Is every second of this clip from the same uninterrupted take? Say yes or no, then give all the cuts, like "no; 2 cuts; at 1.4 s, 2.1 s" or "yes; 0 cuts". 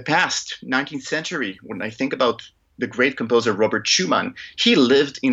yes; 0 cuts